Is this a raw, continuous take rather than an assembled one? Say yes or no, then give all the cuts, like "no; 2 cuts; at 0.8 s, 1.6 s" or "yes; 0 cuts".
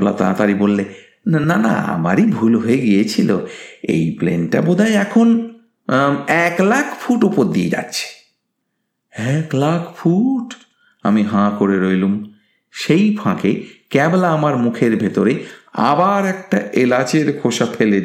yes; 0 cuts